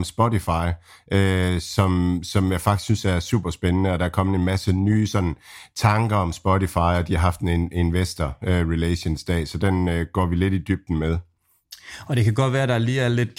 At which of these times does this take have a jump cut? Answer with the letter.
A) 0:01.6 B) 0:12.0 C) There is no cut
C